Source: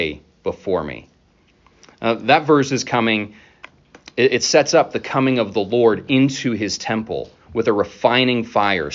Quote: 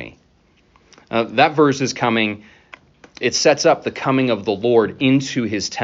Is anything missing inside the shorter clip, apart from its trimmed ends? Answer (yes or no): yes